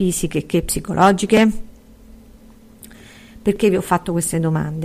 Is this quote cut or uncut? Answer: uncut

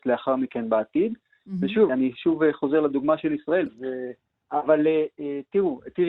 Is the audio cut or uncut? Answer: cut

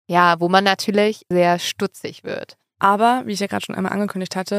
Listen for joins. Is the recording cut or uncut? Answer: cut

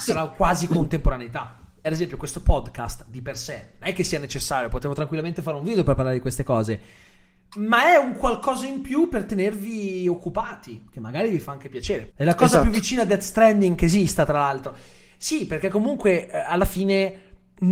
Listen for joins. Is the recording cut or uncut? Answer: cut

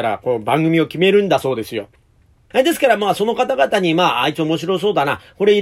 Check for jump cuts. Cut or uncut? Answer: cut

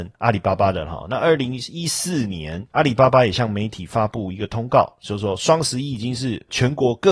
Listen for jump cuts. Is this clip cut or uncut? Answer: uncut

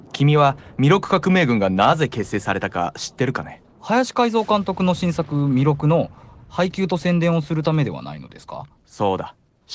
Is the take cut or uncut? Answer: cut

